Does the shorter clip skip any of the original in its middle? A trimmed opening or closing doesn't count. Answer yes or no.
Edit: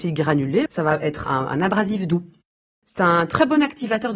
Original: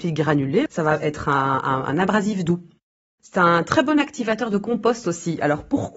yes